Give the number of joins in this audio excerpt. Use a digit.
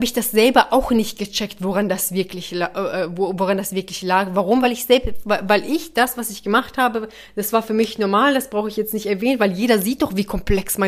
0